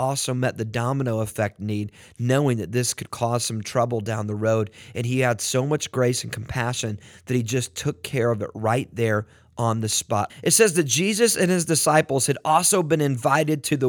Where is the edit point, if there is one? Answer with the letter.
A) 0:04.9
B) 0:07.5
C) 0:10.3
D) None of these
C